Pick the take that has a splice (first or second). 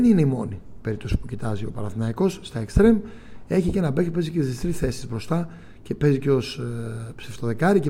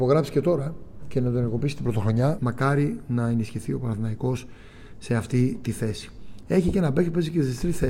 second